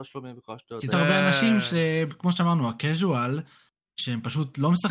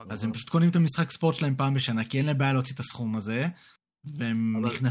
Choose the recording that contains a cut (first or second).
first